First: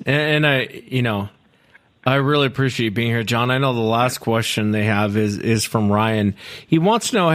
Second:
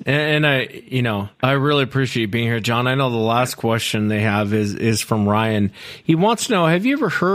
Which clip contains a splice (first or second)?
second